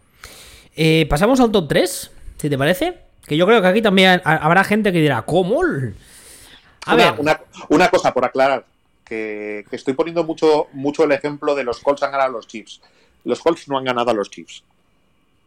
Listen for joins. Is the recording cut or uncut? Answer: uncut